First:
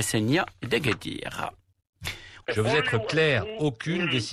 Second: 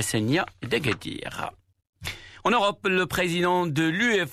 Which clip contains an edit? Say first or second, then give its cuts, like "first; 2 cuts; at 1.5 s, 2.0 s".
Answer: first; 1 cut; at 2.4 s